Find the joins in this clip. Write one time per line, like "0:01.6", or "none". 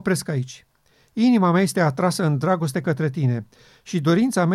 none